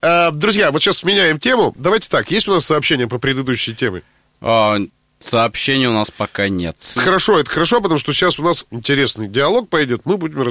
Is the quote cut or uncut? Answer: cut